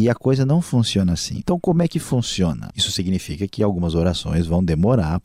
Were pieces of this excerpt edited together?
yes; 2 cuts; at 1.4 s, 2.7 s

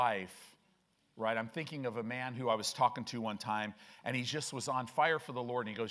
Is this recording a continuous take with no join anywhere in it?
yes; 0 cuts

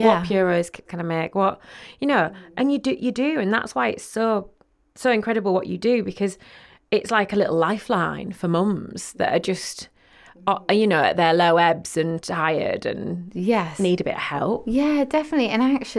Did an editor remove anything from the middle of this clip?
no; 0 cuts

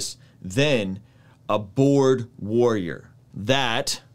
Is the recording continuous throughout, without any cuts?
yes; 0 cuts

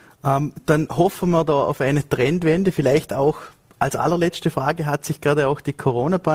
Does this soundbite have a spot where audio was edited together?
no; 0 cuts

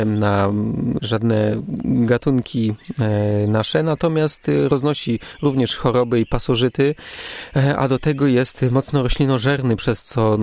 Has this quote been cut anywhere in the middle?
yes; 1 cut; at 1.0 s

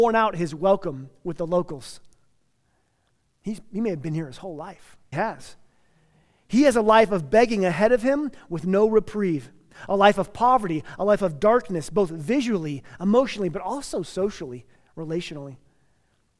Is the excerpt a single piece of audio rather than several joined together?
no; 1 cut; at 5.1 s

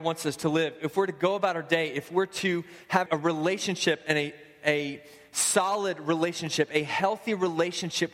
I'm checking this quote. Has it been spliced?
yes; 1 cut; at 3.1 s

